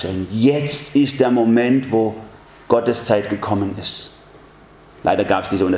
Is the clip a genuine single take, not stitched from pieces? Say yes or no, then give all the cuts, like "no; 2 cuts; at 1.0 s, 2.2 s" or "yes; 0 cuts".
yes; 0 cuts